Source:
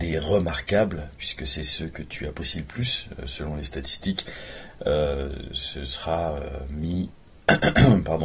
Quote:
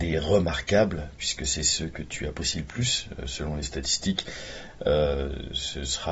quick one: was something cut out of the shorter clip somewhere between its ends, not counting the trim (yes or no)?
no